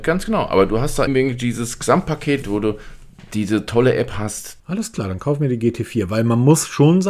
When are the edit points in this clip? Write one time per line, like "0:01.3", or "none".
0:01.1
0:02.4
0:04.6